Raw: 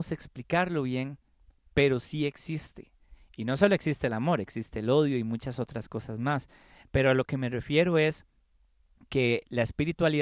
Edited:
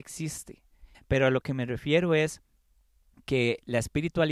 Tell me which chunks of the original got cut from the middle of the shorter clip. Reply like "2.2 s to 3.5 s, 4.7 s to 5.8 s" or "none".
3.2 s to 6.8 s